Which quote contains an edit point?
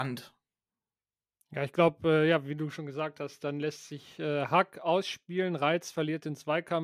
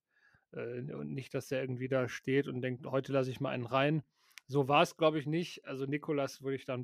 second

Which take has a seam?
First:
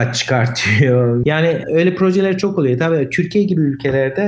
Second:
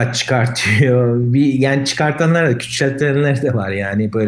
first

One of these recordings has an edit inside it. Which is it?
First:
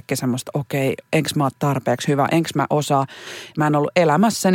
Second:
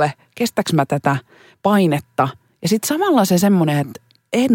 first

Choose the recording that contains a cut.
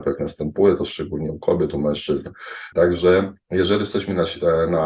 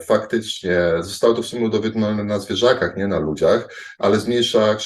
first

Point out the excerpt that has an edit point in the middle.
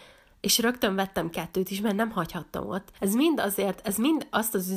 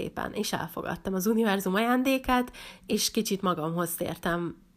first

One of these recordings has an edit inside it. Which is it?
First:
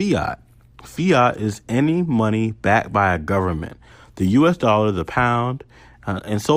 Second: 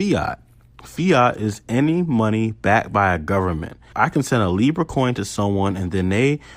second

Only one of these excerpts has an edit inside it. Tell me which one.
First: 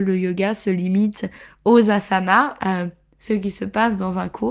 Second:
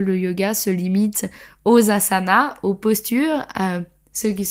first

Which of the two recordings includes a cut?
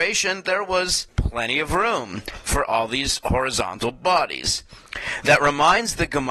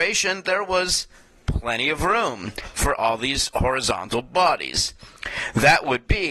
first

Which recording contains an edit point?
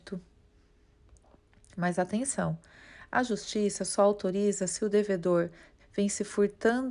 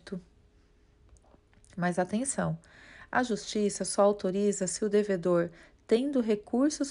first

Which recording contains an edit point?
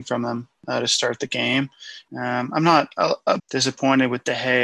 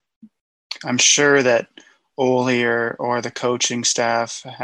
first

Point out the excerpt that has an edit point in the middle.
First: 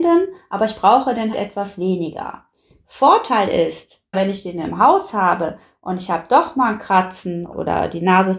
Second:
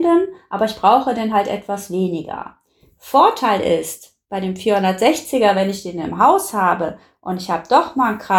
first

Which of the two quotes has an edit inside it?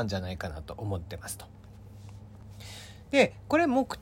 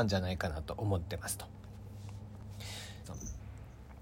second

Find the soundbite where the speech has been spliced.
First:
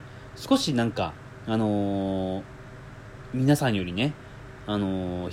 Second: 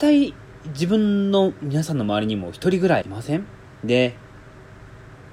second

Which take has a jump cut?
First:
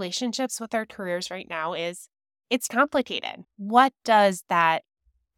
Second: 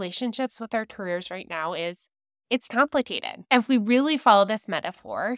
first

